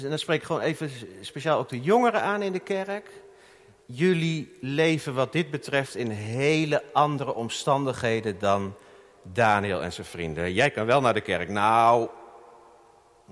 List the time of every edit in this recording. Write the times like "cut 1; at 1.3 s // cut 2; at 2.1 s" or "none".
none